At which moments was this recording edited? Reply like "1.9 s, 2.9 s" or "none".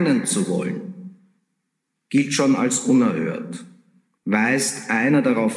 4.2 s